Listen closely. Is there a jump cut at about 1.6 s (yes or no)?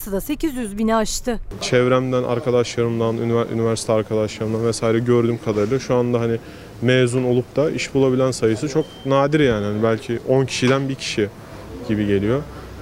yes